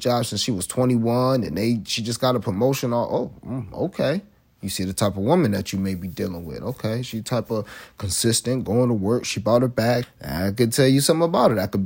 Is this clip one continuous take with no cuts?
no; 1 cut; at 10.0 s

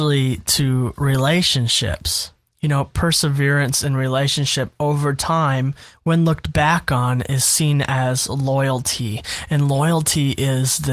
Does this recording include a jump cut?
no; 0 cuts

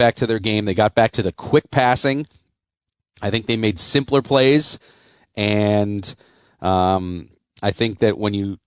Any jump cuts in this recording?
no; 0 cuts

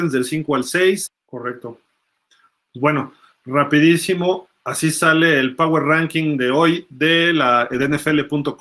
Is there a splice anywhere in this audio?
yes; 1 cut; at 1.1 s

